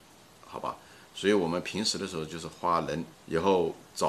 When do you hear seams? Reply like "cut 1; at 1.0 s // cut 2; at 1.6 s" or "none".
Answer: cut 1; at 3.1 s